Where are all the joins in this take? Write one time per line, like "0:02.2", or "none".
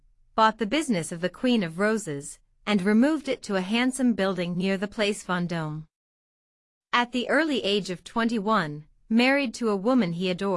none